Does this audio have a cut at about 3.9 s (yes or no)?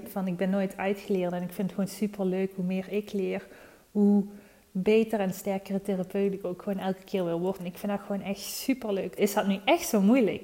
no